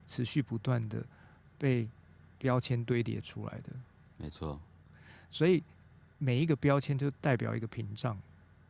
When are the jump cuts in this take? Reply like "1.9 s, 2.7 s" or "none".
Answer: none

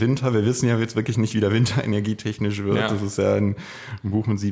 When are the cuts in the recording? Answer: none

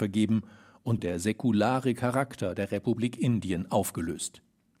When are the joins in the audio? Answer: 1.0 s

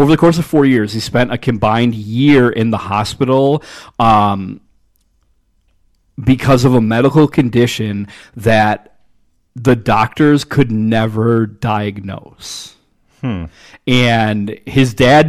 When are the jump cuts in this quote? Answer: none

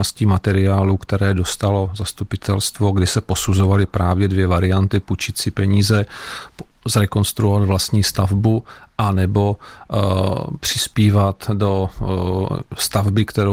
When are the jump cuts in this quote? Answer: none

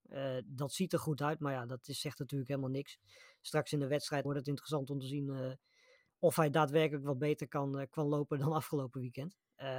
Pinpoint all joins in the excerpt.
4.2 s

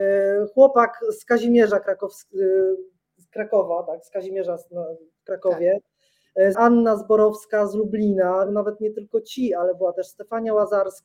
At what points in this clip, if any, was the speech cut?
6.5 s, 8.5 s

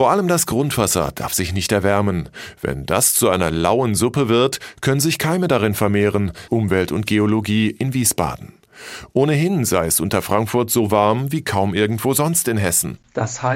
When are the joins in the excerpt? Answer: 6.5 s

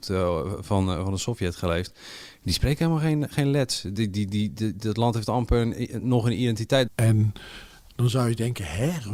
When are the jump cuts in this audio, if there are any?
6.9 s

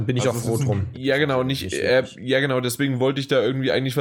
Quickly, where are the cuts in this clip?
0.9 s

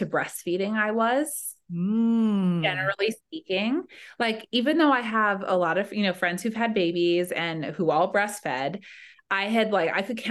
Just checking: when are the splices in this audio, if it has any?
none

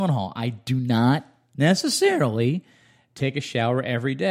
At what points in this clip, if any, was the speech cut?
none

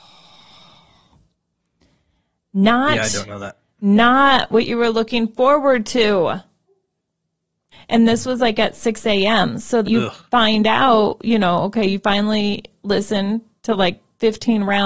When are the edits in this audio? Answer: 7.7 s, 9.8 s

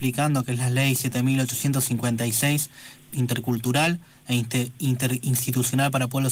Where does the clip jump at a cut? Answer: 3.1 s

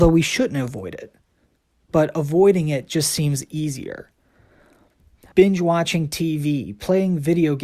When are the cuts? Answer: 5.3 s

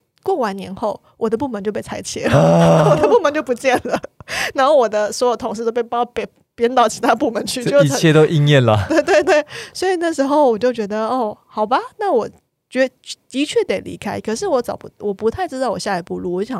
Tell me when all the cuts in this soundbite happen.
none

